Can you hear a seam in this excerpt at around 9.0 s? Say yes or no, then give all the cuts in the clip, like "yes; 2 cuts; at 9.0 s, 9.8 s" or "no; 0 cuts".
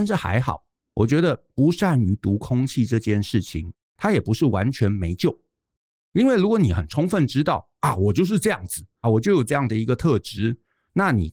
yes; 1 cut; at 9.0 s